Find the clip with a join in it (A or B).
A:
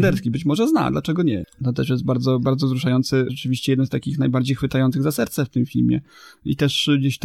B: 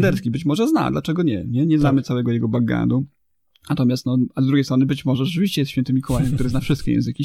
A